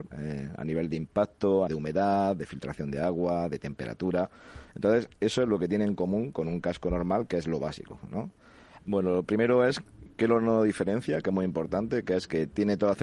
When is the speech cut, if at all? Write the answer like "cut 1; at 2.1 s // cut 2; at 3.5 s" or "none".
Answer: cut 1; at 1.7 s // cut 2; at 8.8 s

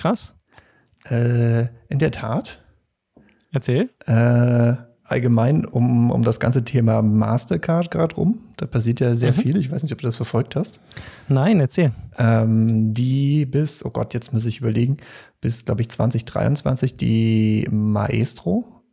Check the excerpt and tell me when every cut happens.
none

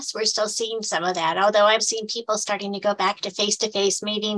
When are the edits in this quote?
cut 1; at 1.8 s

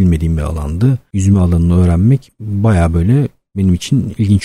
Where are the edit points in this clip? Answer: none

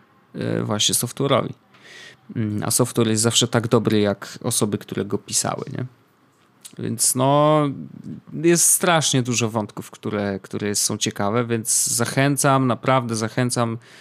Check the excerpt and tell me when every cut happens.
none

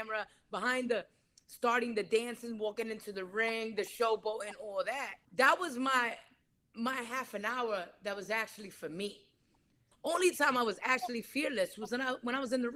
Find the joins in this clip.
cut 1; at 5.2 s // cut 2; at 9.9 s

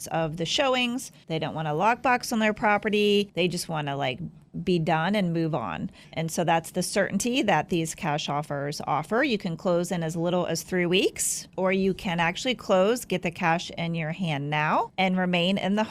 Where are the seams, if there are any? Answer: none

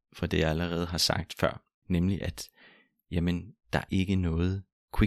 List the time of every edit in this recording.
cut 1; at 1.8 s // cut 2; at 3.9 s

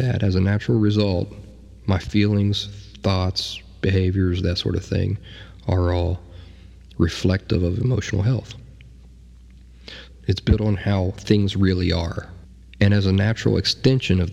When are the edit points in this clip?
cut 1; at 10.1 s

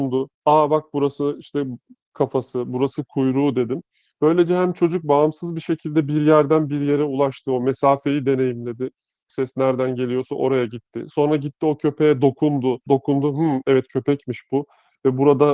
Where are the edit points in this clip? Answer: cut 1; at 9.3 s // cut 2; at 12.9 s

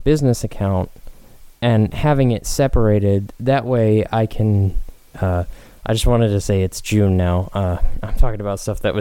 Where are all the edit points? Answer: cut 1; at 5.1 s

